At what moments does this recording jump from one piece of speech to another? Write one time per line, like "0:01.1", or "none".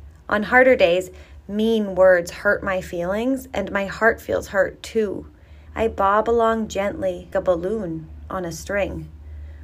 0:05.7
0:07.3

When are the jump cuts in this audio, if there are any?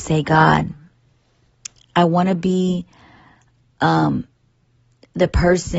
none

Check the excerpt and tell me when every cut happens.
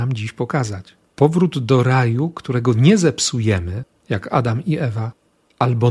0:01.1

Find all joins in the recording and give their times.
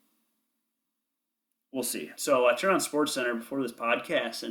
0:02.2

